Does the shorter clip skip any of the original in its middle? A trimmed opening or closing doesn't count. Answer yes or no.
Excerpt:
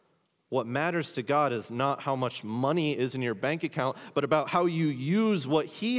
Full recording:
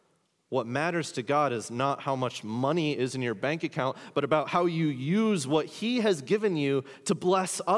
no